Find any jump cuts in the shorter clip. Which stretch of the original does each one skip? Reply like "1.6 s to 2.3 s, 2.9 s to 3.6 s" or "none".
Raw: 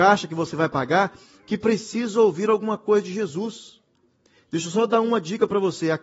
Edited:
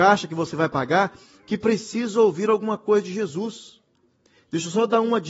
none